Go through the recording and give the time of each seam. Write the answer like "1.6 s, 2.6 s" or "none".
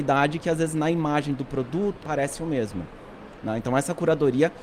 2.0 s